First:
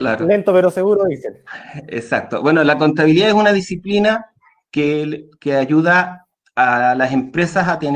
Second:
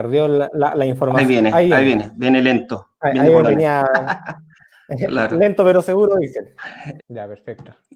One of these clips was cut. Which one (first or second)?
second